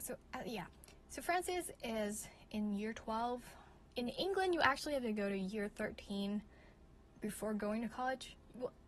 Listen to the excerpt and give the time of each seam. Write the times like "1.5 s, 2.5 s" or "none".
none